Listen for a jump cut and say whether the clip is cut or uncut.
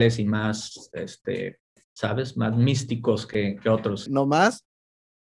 cut